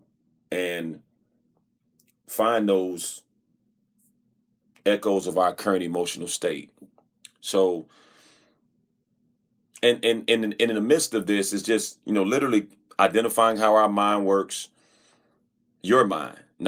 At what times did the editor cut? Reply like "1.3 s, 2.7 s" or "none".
none